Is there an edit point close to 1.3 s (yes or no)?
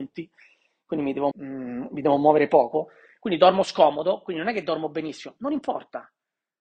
yes